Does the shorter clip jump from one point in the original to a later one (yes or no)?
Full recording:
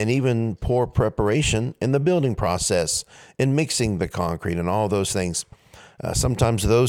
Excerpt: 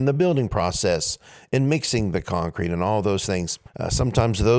yes